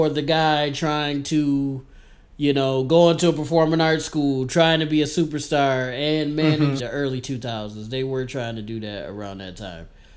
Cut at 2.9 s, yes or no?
no